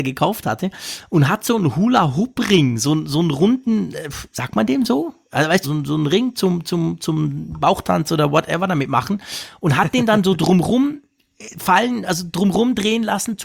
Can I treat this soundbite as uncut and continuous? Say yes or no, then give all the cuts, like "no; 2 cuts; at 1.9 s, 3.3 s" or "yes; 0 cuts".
no; 1 cut; at 5.6 s